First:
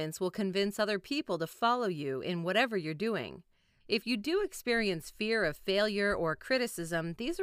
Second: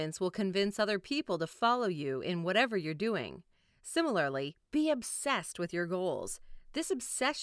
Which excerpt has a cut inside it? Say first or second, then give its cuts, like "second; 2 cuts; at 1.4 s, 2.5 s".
first; 1 cut; at 3.8 s